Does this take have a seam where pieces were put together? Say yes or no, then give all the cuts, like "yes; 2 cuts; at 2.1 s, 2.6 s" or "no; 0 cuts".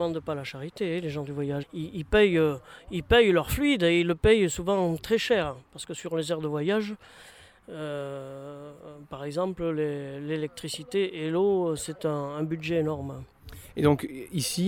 yes; 1 cut; at 1.6 s